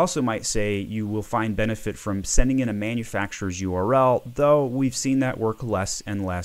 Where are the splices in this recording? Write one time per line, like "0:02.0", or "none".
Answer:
none